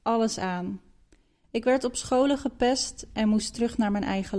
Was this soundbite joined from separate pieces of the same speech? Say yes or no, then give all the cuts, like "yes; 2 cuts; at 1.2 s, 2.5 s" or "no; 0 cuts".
yes; 1 cut; at 1.4 s